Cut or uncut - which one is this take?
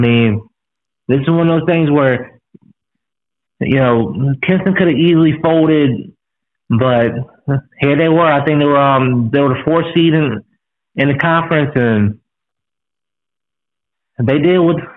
uncut